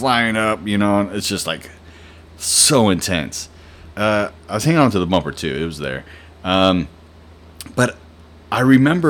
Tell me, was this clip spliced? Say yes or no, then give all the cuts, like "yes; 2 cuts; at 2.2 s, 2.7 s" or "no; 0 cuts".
yes; 1 cut; at 3.9 s